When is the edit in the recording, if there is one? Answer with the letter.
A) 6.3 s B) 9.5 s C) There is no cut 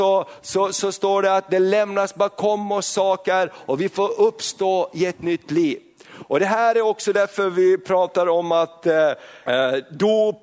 B